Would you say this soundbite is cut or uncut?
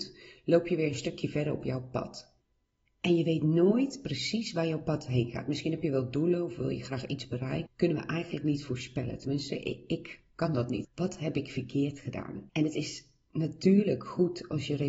cut